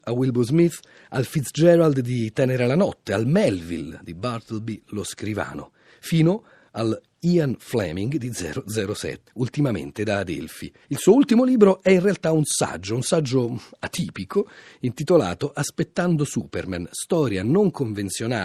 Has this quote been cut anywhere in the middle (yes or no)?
yes